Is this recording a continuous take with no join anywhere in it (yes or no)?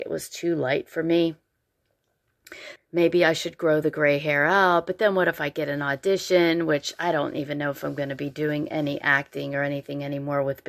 no